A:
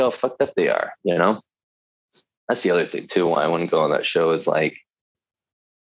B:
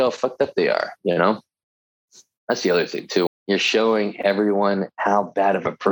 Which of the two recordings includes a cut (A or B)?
B